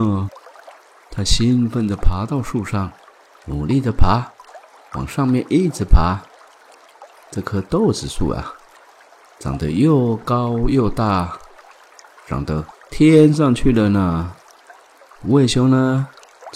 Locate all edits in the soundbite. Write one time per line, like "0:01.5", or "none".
none

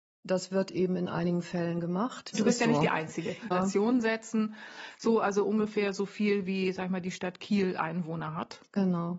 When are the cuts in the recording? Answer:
0:02.3
0:03.5

